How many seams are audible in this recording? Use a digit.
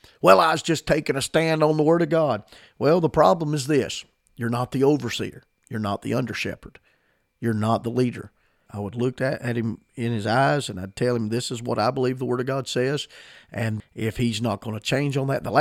2